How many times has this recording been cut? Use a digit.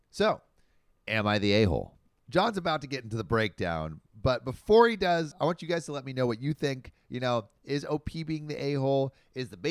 1